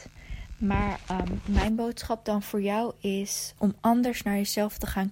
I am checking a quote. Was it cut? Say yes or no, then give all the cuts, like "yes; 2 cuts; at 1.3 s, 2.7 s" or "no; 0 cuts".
yes; 1 cut; at 3.6 s